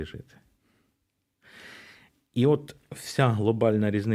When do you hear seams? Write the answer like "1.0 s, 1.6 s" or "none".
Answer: none